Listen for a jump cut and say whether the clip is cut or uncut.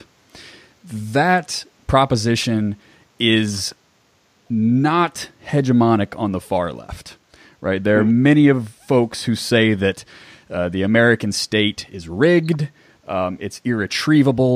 cut